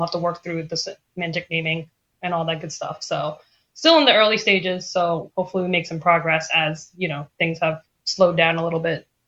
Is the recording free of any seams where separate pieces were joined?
yes; 0 cuts

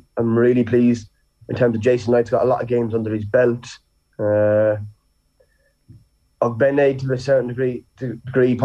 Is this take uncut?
yes; 0 cuts

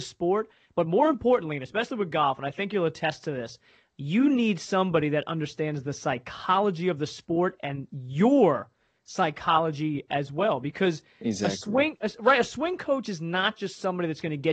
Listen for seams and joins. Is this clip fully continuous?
yes; 0 cuts

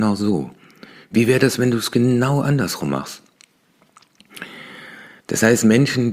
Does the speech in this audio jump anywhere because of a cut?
yes; 1 cut; at 5.2 s

